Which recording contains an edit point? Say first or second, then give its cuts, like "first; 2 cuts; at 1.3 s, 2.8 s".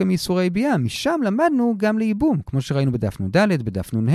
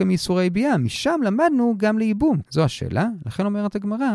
second; 1 cut; at 2.4 s